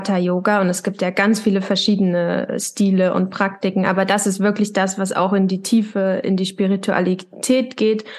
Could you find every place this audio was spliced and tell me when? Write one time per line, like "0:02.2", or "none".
none